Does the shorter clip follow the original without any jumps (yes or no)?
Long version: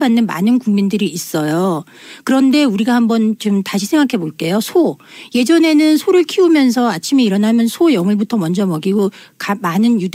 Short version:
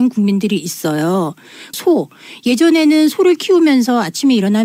no